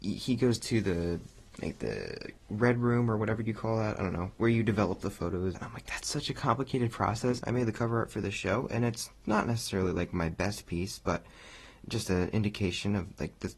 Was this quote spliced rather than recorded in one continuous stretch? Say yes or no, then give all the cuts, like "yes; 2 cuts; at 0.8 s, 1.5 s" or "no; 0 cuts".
yes; 2 cuts; at 5.5 s, 7.4 s